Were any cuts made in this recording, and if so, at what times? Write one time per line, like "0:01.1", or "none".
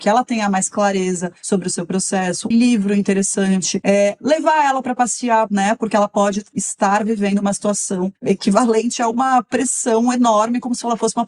0:02.5
0:05.5